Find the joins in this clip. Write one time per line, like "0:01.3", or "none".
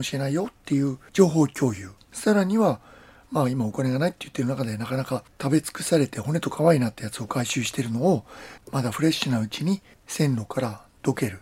0:08.6